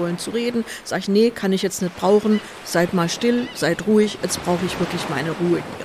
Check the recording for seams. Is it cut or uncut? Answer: uncut